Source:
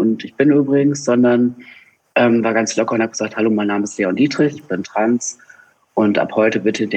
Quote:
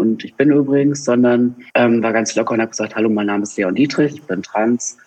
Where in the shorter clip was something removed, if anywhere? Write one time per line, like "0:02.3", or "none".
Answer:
0:01.7